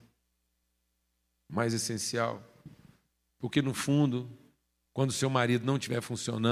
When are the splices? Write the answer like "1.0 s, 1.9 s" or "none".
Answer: 3.3 s